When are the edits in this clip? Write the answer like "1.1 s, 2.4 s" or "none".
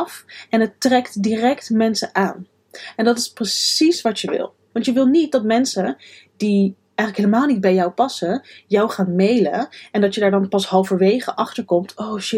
4.7 s